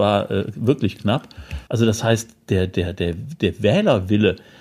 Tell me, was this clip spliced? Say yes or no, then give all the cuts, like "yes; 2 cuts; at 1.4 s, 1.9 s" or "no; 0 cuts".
yes; 1 cut; at 1.7 s